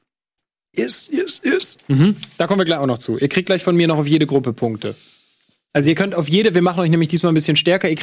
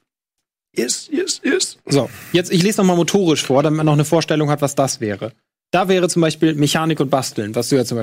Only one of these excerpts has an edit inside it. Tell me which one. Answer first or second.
first